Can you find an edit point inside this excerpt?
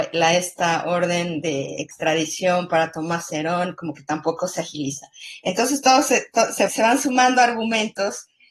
yes; 1 cut; at 6.7 s

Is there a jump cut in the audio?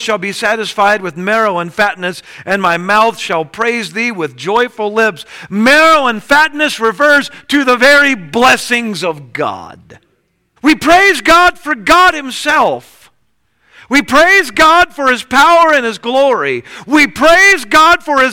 yes; 1 cut; at 10.6 s

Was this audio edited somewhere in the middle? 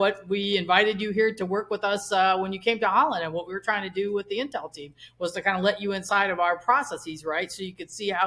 no; 0 cuts

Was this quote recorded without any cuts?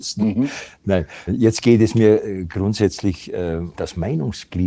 no; 2 cuts; at 1.3 s, 3.7 s

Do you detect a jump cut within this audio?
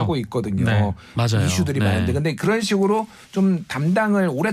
yes; 1 cut; at 1.1 s

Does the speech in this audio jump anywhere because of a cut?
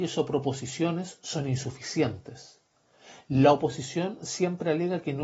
no; 0 cuts

